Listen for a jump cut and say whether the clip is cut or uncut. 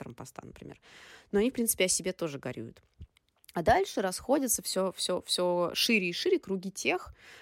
uncut